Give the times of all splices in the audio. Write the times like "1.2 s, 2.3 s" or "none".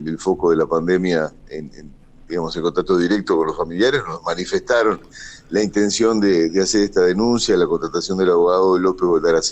none